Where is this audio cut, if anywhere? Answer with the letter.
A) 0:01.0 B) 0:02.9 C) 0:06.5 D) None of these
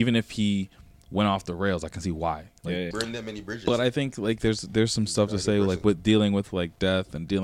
B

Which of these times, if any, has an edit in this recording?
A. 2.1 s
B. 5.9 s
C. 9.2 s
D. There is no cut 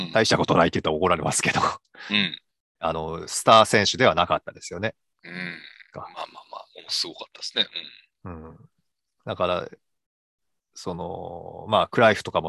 B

